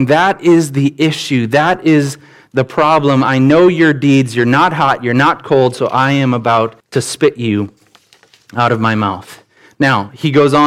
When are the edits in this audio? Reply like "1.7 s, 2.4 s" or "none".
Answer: 6.8 s